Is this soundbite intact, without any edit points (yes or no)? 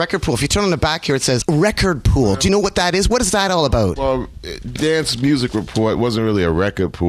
yes